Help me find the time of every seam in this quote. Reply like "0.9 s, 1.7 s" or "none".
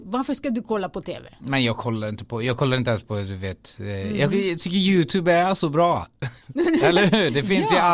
1.4 s

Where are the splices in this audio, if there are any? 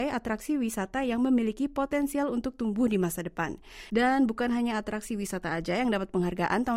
3.9 s

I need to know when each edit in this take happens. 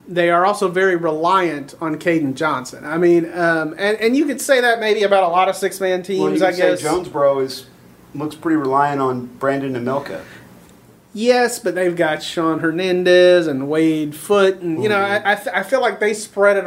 none

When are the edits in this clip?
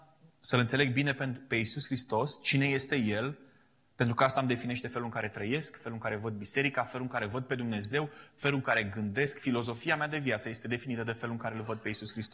none

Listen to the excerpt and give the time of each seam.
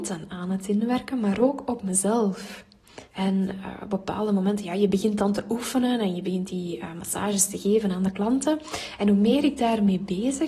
3.1 s

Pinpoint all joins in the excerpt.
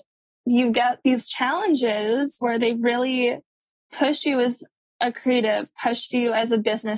none

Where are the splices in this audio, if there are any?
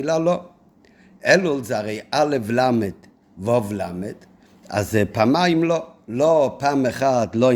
none

